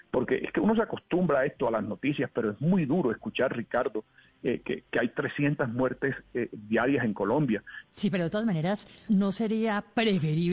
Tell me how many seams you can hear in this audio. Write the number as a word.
two